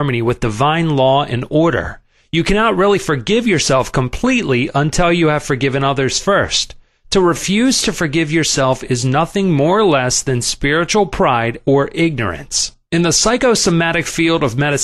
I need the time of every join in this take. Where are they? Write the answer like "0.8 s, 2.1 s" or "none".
none